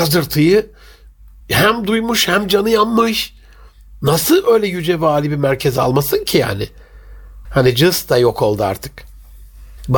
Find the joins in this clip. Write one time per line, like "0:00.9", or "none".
0:07.4